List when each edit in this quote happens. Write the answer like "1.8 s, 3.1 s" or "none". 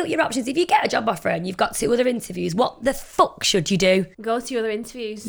4.1 s